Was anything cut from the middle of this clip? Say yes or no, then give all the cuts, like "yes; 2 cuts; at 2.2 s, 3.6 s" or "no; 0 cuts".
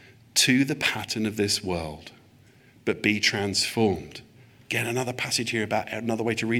no; 0 cuts